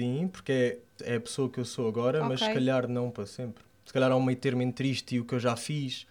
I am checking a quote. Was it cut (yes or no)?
yes